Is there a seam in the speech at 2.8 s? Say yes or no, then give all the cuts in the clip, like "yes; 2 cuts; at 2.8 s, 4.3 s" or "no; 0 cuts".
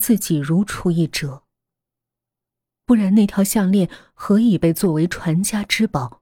yes; 1 cut; at 2.8 s